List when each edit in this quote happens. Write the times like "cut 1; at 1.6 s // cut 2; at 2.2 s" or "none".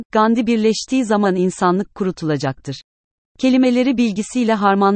cut 1; at 3.2 s